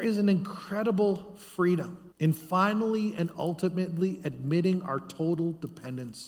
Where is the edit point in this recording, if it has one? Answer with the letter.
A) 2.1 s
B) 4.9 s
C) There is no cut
A